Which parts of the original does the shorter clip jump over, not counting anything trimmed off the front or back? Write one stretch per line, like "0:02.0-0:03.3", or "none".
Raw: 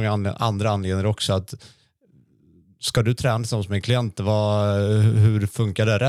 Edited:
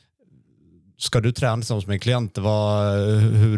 none